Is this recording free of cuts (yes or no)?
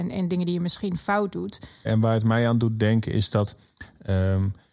no